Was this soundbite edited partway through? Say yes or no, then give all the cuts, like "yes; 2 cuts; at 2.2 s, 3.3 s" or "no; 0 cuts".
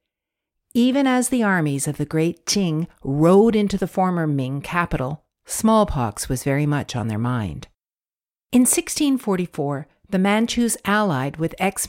yes; 1 cut; at 8.5 s